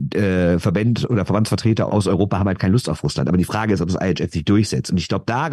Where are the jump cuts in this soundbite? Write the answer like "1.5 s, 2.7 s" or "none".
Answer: 1.9 s